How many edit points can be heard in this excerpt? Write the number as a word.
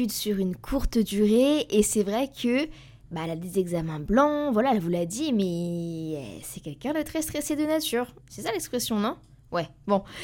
one